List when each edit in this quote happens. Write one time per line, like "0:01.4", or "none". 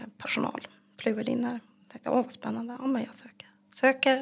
none

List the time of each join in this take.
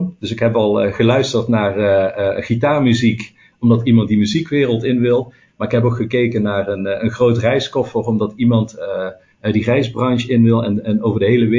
none

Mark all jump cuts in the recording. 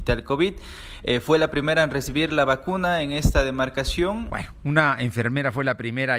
0:04.3

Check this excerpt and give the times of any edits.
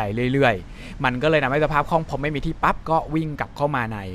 0:02.6

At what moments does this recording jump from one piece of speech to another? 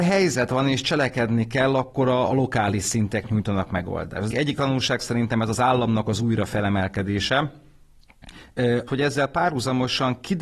0:04.3
0:08.9

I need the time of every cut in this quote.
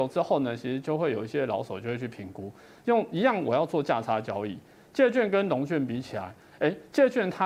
none

